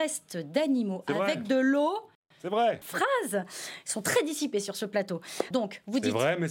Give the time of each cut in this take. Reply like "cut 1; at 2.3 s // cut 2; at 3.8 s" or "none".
cut 1; at 2.8 s // cut 2; at 5.5 s